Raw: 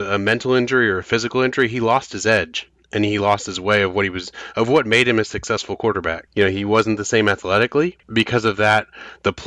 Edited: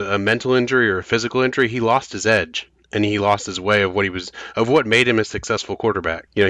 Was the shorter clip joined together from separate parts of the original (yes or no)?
no